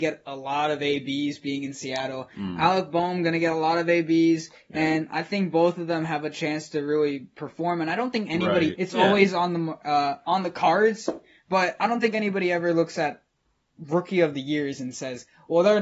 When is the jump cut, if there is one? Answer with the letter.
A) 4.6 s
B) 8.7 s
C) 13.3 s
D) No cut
B